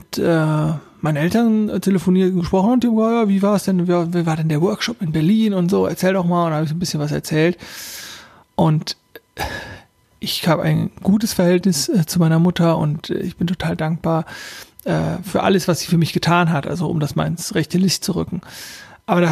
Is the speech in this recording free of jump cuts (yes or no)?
no